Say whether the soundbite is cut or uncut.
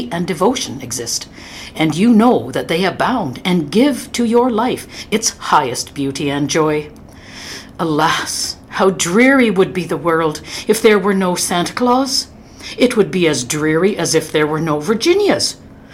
uncut